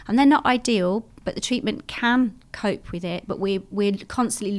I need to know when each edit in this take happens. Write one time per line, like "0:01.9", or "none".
none